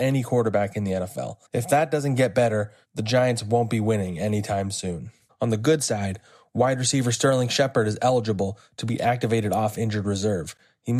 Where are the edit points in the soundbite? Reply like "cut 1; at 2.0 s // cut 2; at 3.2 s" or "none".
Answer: cut 1; at 1.5 s // cut 2; at 5.3 s